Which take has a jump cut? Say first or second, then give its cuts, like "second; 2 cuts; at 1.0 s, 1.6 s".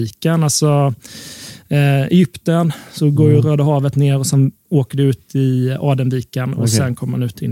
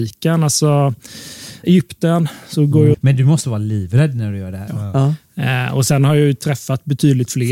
second; 3 cuts; at 1.6 s, 2.9 s, 4.7 s